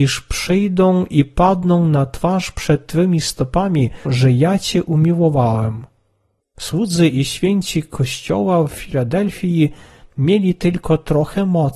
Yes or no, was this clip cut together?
yes